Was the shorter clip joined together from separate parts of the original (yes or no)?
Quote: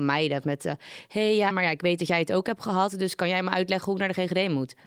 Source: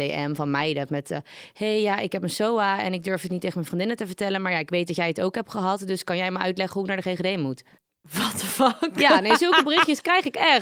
yes